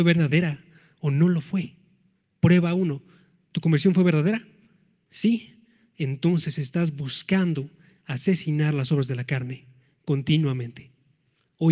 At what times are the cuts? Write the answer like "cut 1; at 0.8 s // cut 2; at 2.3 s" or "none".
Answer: none